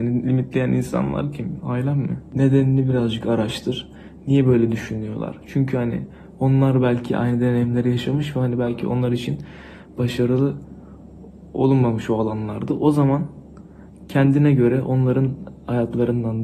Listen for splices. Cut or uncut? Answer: cut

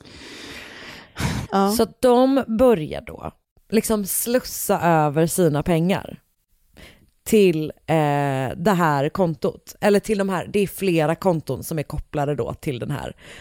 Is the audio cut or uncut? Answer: cut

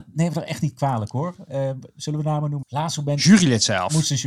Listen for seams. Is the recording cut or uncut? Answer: cut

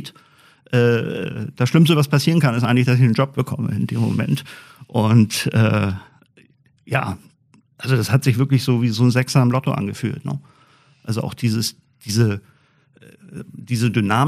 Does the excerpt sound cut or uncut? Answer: uncut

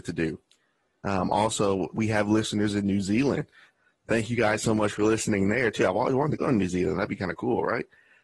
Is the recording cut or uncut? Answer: cut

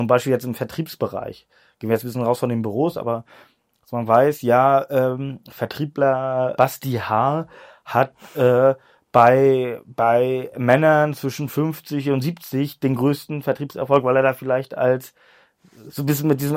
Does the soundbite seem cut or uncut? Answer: uncut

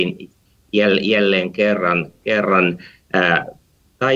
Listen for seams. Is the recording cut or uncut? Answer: uncut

